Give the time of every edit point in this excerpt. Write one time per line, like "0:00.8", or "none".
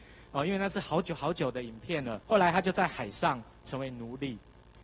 0:02.2